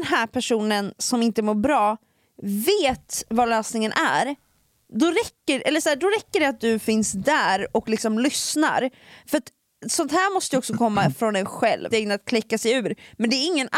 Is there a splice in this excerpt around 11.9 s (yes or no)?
yes